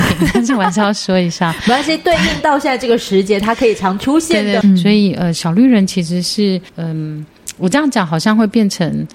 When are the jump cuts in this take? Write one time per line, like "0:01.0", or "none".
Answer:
0:04.6
0:06.7